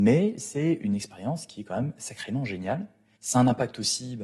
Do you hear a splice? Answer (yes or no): yes